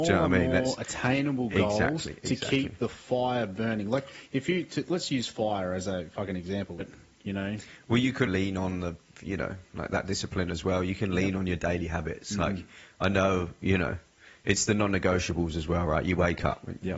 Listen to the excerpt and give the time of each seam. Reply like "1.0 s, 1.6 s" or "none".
6.8 s, 8.3 s